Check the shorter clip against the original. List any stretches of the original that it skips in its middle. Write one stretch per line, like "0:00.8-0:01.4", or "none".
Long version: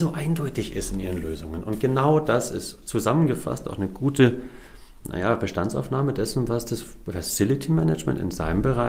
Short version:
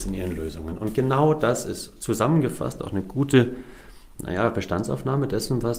none